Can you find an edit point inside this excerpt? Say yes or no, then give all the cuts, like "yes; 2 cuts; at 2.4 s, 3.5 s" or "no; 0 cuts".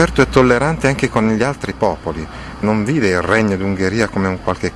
yes; 1 cut; at 2.6 s